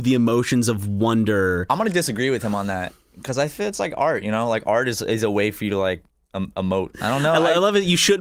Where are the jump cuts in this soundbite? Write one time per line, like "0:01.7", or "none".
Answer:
0:06.9